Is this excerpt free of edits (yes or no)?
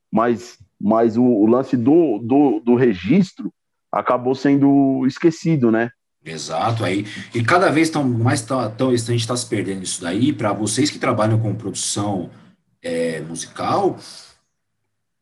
no